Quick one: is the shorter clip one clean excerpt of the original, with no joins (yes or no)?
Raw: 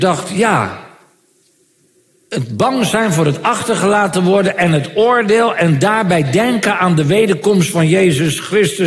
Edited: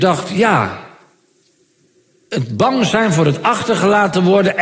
yes